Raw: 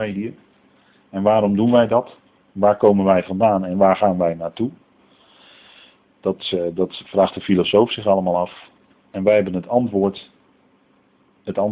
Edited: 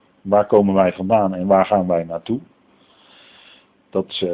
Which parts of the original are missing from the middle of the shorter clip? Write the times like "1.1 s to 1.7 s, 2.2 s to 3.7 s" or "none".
none